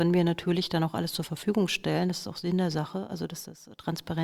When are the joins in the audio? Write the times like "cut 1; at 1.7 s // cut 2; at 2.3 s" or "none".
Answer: none